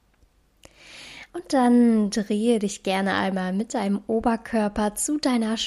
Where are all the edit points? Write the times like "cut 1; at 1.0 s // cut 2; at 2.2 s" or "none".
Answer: cut 1; at 1.3 s